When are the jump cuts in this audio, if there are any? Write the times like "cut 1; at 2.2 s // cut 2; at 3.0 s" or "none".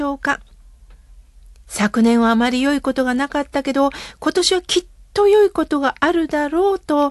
none